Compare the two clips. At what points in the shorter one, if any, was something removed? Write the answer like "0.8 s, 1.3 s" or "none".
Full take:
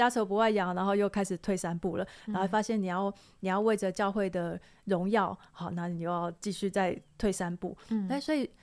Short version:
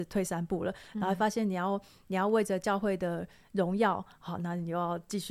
none